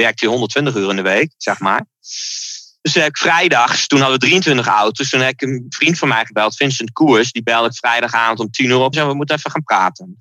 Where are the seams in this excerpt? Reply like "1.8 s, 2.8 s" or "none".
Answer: 8.9 s